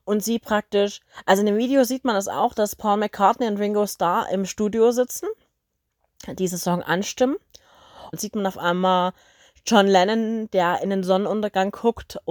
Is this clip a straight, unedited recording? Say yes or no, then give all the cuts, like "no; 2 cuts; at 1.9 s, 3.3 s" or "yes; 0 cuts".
no; 1 cut; at 8.1 s